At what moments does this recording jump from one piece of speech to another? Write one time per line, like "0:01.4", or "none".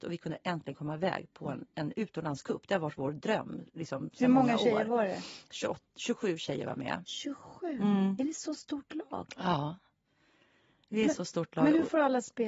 none